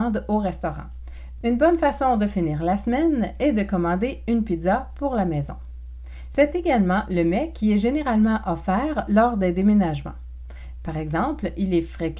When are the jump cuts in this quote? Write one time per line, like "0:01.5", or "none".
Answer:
0:01.4